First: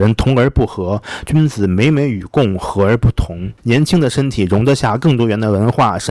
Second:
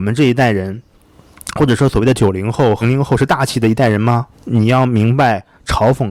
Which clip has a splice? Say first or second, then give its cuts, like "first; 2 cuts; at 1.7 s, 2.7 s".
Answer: second; 2 cuts; at 2.8 s, 4.3 s